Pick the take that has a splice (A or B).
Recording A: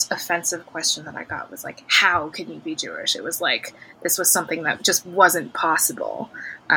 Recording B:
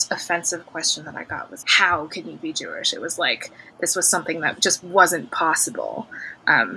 B